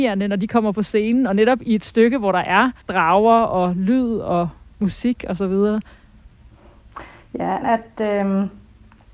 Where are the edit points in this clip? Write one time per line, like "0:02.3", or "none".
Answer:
0:02.8
0:07.6